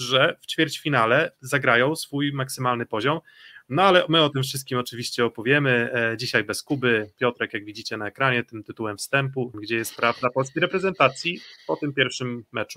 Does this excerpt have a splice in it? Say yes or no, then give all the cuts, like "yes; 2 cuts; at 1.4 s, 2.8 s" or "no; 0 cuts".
yes; 1 cut; at 9.5 s